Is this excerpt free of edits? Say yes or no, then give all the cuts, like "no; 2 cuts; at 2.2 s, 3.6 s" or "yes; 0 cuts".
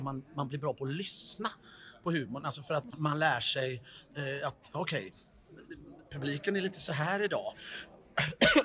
no; 1 cut; at 2.9 s